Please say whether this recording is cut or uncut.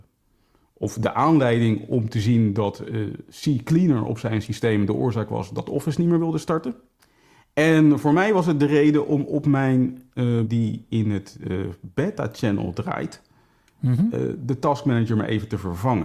cut